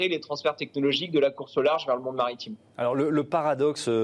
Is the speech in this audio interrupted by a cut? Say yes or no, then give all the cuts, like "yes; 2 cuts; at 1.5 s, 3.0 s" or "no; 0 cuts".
no; 0 cuts